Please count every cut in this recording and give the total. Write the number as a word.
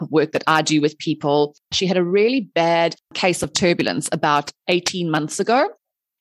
one